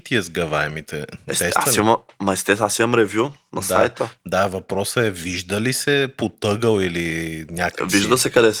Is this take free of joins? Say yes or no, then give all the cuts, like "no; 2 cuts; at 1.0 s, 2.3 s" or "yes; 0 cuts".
yes; 0 cuts